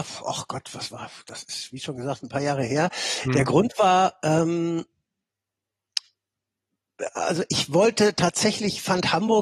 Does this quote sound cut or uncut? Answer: uncut